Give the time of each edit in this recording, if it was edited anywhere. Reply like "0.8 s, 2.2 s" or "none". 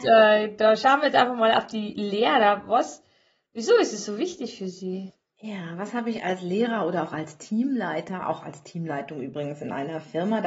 none